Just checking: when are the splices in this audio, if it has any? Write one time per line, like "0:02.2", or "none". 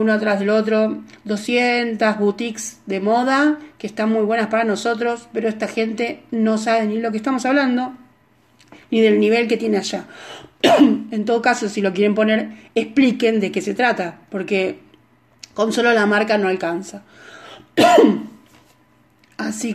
none